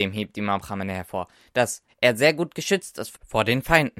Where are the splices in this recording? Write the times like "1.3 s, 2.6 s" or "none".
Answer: 1.9 s